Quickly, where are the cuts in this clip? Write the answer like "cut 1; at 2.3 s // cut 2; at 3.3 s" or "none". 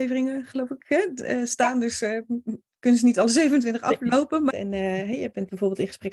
cut 1; at 4.5 s

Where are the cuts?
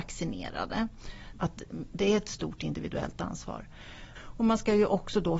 cut 1; at 1.3 s // cut 2; at 4.2 s

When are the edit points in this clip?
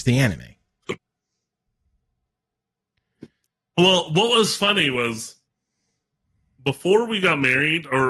none

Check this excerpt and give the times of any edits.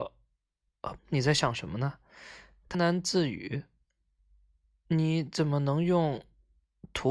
cut 1; at 1.0 s // cut 2; at 2.7 s

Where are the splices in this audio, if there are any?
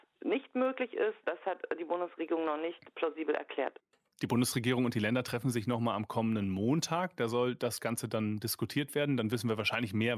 cut 1; at 1.2 s

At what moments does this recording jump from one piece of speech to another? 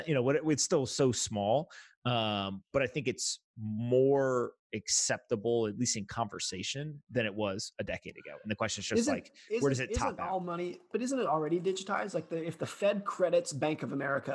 none

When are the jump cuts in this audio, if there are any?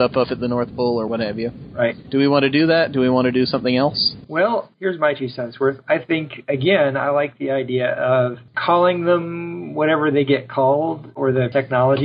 none

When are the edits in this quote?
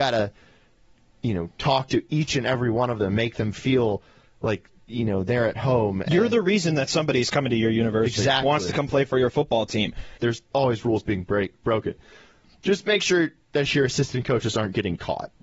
cut 1; at 8.4 s // cut 2; at 10.2 s

